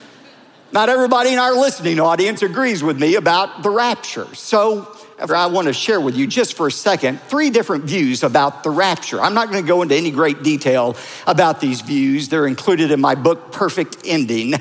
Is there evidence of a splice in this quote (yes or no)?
yes